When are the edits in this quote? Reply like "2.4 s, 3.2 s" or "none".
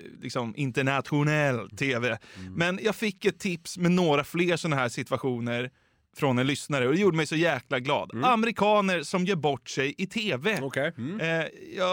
none